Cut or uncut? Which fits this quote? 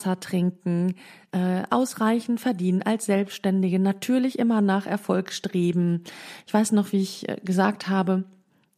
uncut